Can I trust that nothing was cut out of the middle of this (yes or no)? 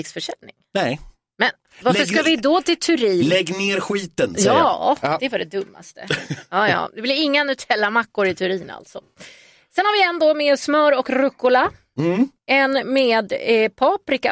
yes